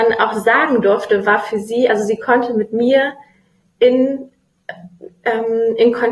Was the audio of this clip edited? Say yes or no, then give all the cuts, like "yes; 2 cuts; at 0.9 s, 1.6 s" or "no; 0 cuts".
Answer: no; 0 cuts